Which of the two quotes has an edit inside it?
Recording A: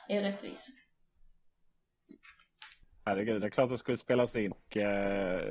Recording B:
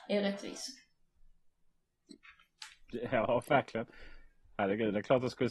A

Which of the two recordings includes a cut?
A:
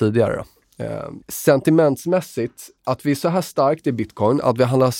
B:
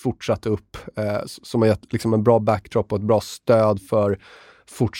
A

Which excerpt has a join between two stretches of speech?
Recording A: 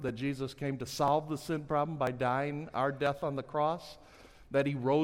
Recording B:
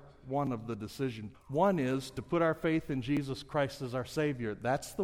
B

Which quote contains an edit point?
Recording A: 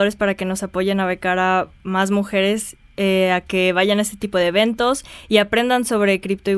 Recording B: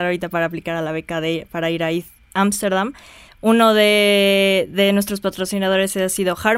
B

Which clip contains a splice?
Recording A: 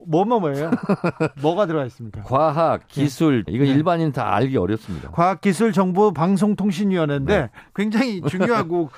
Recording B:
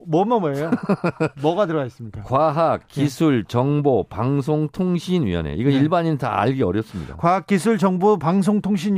A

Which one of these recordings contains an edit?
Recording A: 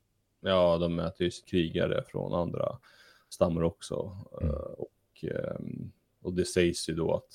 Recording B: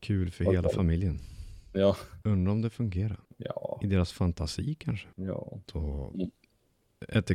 B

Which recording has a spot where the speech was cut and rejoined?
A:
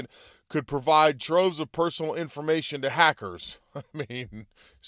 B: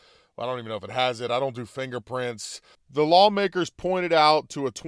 B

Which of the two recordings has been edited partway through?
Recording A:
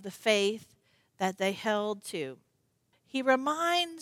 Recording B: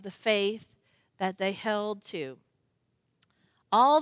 A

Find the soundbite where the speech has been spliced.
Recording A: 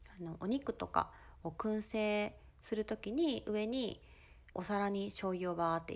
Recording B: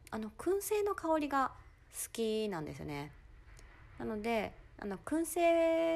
A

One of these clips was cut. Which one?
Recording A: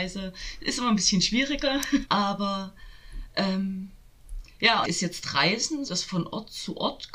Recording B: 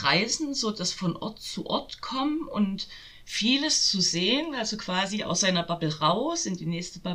A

